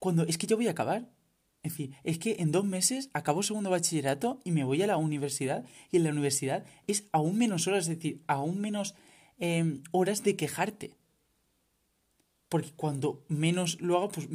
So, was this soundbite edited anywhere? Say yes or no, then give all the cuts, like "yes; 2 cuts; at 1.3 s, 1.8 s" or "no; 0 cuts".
no; 0 cuts